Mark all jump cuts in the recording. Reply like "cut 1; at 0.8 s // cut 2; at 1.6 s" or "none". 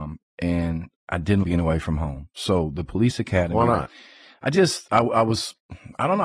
cut 1; at 1.4 s